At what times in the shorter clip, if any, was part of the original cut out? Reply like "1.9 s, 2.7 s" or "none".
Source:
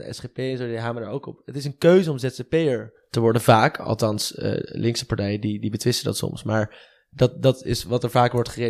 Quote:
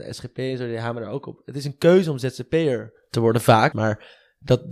3.7 s